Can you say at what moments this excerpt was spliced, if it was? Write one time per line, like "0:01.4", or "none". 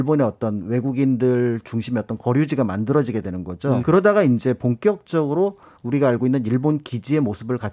0:03.8

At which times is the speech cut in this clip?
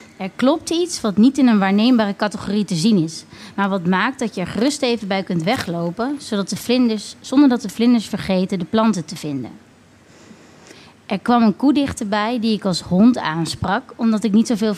none

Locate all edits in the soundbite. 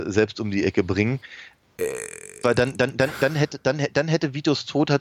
0:01.6

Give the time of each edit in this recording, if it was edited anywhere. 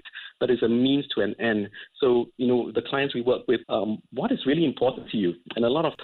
0:03.6

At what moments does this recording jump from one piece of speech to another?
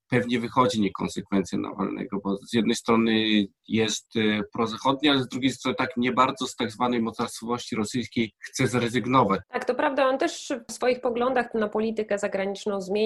0:09.4

